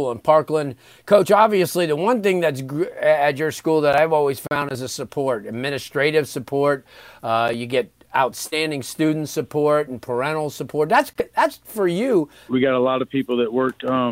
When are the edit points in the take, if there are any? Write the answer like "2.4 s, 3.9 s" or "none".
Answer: 12.5 s